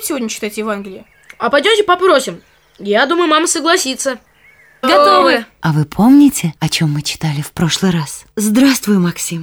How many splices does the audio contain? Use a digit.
3